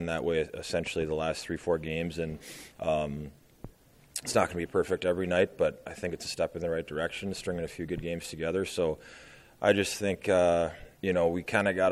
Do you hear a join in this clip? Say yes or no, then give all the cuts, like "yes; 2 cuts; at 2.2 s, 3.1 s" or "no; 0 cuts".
yes; 1 cut; at 10.9 s